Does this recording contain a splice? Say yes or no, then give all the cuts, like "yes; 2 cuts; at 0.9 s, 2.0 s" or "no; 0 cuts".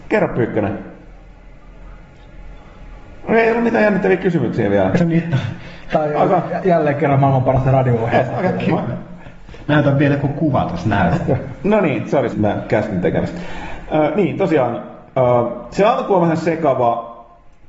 yes; 2 cuts; at 4.9 s, 12.3 s